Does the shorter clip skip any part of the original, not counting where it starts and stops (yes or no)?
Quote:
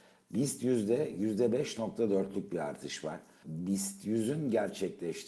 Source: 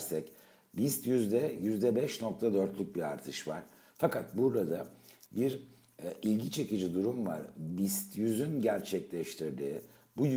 yes